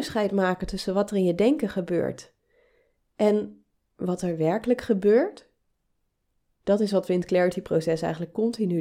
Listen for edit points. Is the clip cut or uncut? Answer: uncut